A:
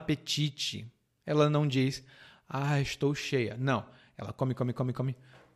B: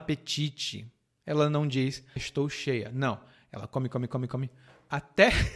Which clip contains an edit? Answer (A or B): B